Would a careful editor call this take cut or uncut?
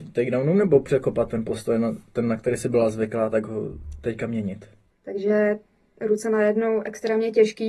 cut